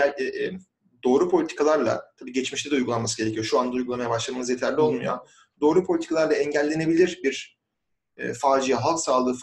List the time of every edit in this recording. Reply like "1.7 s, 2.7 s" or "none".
none

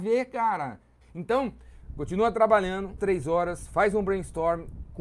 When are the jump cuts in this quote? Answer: 1.0 s, 3.0 s

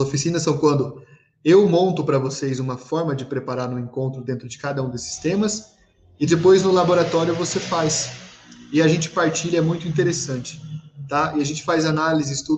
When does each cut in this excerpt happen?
none

